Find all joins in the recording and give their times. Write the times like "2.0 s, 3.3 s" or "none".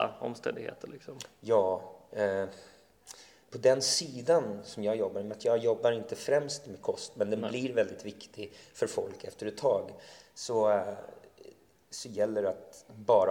none